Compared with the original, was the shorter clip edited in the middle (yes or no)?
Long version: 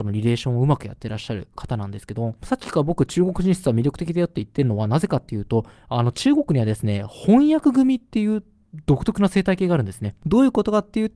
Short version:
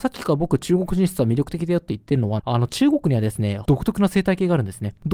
yes